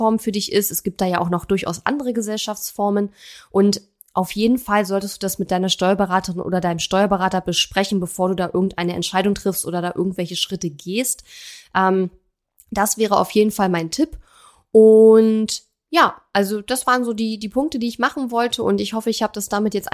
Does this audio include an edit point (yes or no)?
no